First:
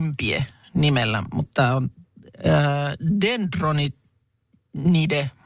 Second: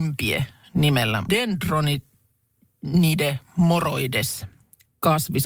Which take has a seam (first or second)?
second